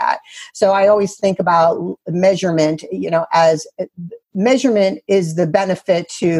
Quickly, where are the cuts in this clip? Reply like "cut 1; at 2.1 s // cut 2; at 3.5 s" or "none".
cut 1; at 4.2 s